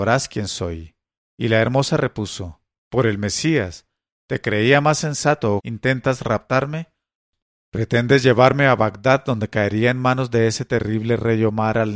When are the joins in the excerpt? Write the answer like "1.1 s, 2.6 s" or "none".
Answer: 1.3 s, 5.6 s